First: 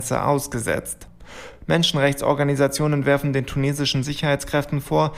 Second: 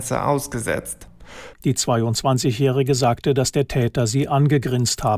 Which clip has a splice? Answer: second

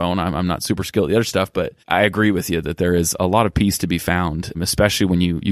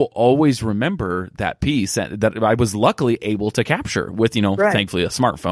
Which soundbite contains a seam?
first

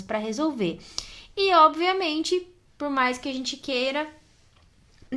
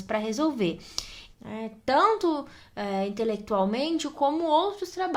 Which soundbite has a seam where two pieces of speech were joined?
second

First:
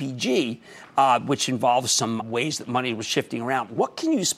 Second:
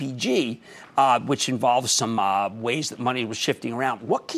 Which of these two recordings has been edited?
first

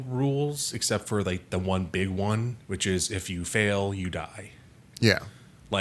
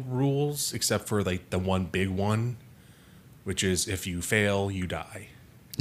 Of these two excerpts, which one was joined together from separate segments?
first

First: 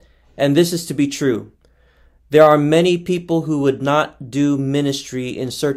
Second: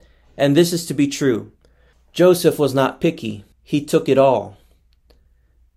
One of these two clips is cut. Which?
second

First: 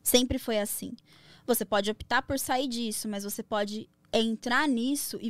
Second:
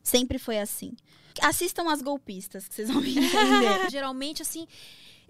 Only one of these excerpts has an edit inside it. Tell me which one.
second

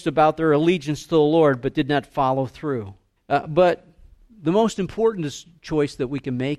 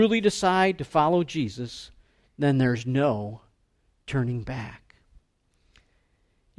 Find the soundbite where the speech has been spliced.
first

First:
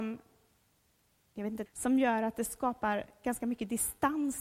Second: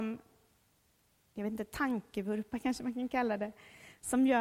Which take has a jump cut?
first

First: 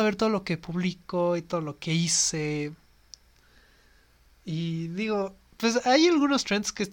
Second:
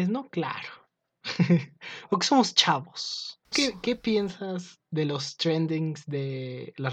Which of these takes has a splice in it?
second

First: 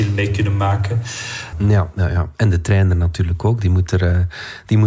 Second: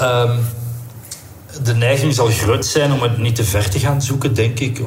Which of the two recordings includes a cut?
first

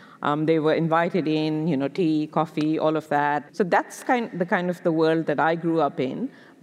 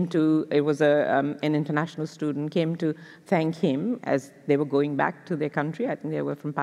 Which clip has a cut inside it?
first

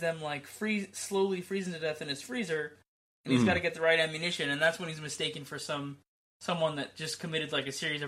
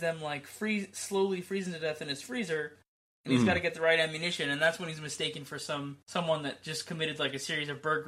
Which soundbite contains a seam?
second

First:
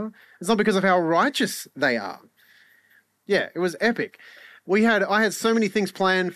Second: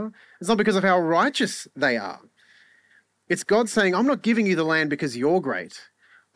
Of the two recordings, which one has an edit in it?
first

